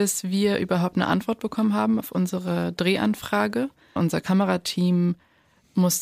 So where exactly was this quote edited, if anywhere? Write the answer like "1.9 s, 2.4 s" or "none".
4.0 s